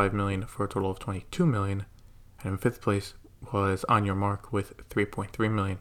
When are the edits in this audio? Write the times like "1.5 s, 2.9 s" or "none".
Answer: none